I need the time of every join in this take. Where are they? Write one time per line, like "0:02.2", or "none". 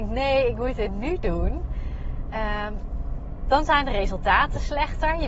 none